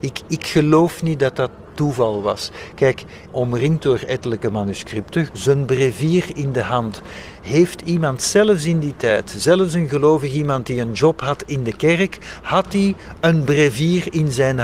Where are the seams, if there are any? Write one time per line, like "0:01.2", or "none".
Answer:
0:03.3
0:05.3